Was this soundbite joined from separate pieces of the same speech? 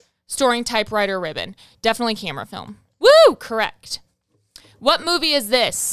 no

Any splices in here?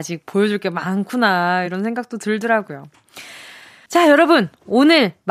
no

